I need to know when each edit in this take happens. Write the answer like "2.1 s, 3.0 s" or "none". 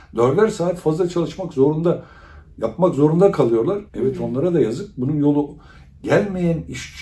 3.9 s